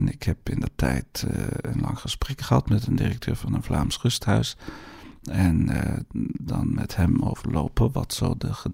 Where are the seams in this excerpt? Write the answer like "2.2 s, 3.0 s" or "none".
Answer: none